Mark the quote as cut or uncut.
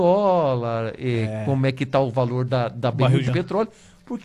cut